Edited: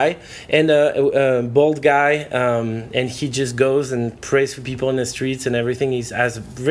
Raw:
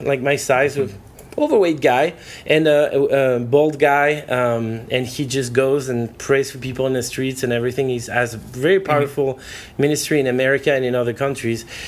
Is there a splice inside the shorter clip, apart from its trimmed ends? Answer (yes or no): no